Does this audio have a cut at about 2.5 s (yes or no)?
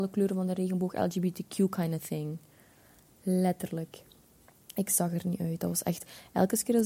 no